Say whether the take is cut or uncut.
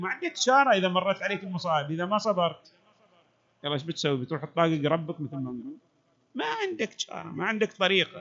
uncut